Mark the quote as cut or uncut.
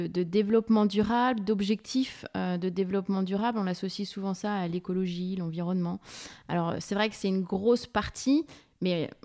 uncut